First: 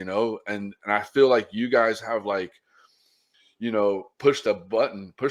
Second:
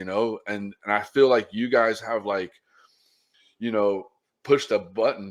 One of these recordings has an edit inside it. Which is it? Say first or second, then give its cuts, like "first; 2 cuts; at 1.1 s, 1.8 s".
first; 1 cut; at 4.1 s